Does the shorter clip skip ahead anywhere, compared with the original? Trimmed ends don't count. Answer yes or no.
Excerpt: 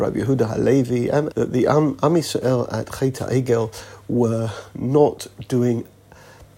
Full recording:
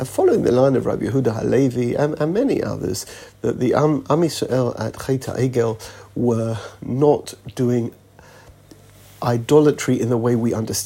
yes